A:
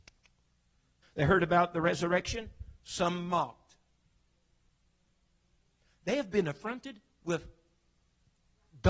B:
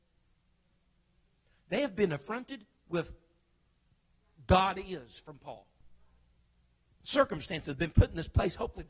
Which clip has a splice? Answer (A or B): A